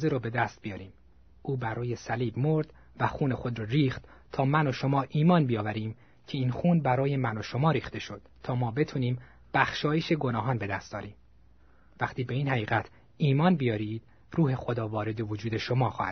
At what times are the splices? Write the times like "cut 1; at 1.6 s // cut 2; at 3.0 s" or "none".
cut 1; at 8.3 s